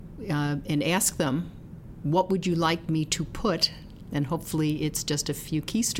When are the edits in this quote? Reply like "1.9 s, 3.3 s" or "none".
none